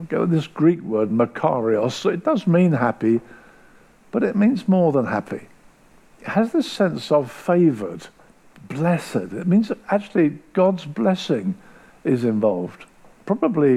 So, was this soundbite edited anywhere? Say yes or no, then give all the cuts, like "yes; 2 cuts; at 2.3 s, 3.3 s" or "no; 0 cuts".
no; 0 cuts